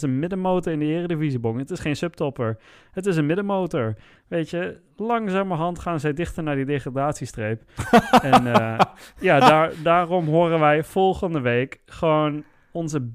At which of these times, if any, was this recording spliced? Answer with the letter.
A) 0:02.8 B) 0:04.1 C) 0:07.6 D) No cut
B